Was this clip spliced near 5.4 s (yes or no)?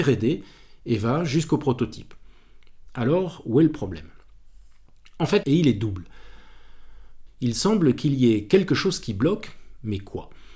yes